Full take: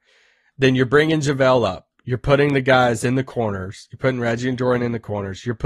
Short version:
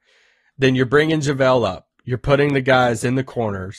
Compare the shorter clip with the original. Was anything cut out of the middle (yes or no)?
no